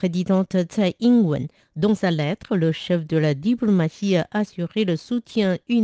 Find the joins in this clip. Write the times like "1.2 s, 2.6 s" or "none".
1.6 s

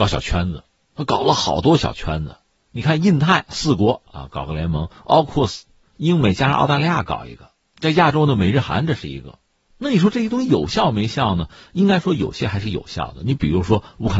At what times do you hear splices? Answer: 9.7 s

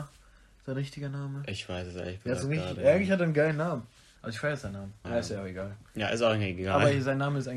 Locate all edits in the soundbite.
5.0 s

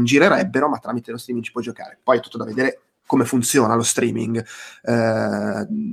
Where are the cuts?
none

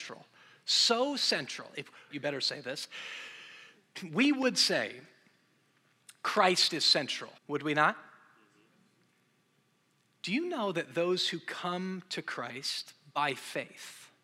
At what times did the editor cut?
2.1 s, 7.4 s

